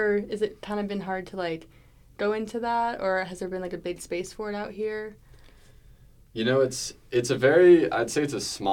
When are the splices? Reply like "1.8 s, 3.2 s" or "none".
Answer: none